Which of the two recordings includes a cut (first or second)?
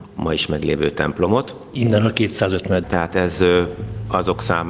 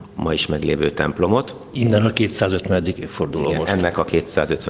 first